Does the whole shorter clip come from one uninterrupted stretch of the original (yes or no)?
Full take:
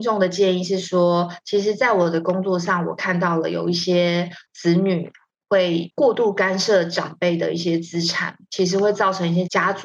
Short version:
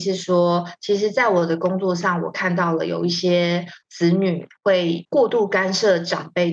no